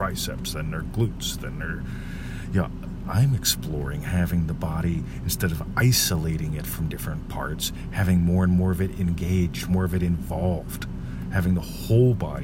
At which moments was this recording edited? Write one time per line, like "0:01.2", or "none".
none

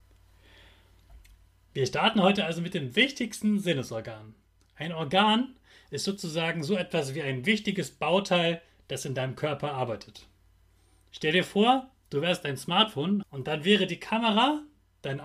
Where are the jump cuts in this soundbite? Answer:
0:13.2

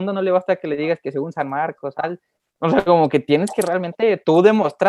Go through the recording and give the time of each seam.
0:01.9

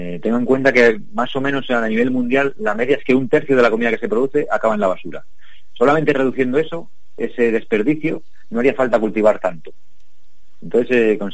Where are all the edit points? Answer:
0:07.2

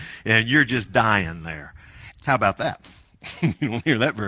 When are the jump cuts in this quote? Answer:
0:02.1

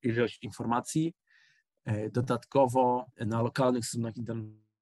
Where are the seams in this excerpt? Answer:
0:03.1

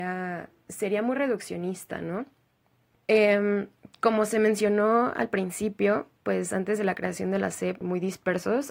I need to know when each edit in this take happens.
0:02.9
0:07.8

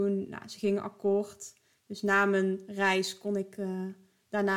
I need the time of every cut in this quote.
none

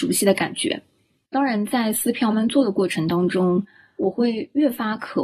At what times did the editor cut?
0:02.3
0:04.0

